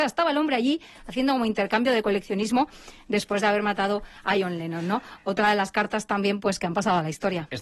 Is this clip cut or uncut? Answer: uncut